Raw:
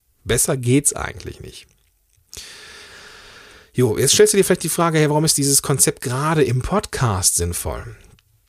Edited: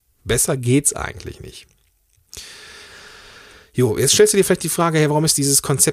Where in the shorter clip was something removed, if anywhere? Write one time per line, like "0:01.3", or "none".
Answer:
none